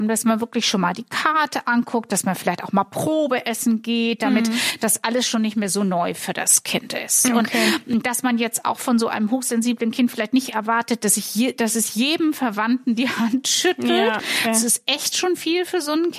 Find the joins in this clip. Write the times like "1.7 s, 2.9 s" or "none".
none